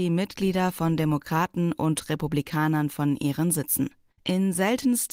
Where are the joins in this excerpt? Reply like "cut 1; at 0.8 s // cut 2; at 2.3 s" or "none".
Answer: cut 1; at 4.1 s